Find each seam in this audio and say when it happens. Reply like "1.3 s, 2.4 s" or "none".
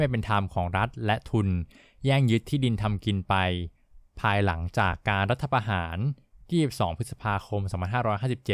none